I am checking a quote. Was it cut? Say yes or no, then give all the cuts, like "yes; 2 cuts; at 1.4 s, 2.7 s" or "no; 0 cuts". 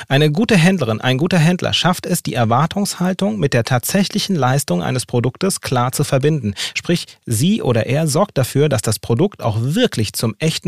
no; 0 cuts